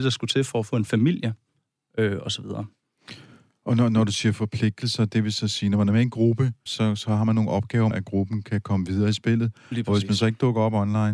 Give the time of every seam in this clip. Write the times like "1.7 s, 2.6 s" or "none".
6.7 s, 7.9 s